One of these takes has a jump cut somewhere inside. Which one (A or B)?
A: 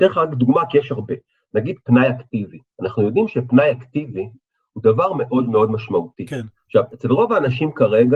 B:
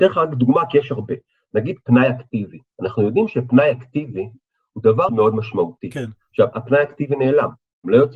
B